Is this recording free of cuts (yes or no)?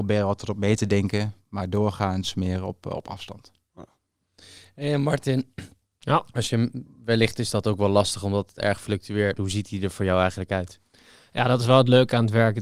no